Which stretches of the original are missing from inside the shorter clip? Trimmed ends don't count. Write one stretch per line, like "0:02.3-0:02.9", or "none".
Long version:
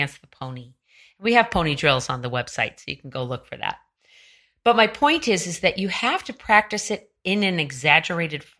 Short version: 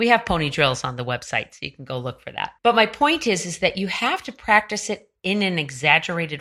0:03.8-0:04.6